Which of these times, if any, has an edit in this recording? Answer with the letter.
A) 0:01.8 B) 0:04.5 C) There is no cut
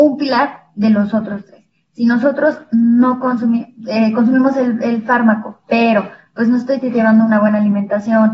C